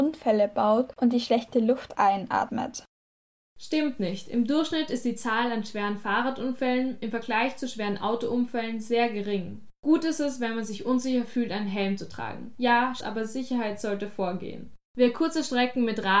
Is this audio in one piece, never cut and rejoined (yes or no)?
no